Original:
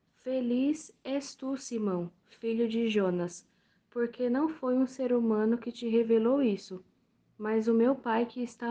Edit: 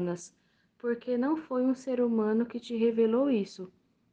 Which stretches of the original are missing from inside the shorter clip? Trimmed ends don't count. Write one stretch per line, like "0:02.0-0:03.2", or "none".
none